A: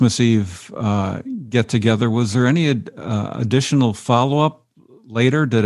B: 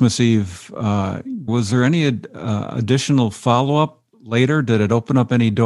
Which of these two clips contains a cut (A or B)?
B